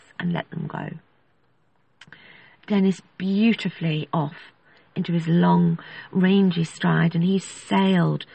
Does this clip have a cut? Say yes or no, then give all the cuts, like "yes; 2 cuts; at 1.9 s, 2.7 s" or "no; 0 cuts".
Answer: no; 0 cuts